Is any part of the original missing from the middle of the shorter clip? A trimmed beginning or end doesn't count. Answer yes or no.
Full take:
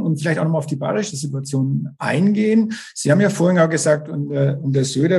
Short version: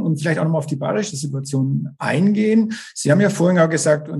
no